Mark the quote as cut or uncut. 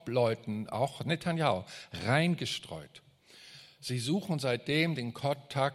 uncut